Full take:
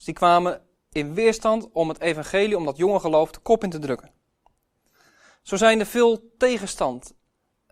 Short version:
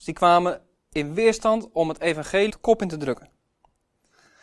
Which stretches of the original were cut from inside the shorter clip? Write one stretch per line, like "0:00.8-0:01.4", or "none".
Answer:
0:02.5-0:03.3